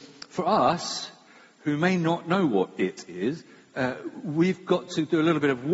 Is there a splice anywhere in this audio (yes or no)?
no